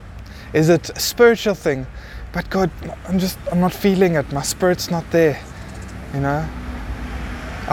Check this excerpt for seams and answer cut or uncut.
cut